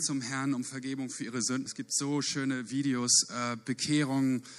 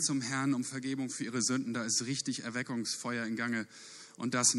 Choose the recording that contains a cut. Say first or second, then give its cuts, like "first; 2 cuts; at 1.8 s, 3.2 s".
first; 1 cut; at 1.7 s